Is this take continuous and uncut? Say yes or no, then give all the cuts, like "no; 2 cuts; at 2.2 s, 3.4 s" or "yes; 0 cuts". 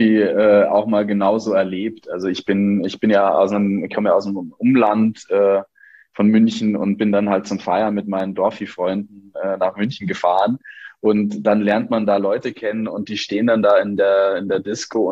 yes; 0 cuts